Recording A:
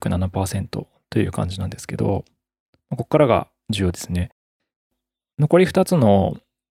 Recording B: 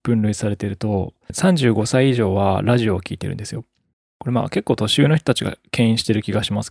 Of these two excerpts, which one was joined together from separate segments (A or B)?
B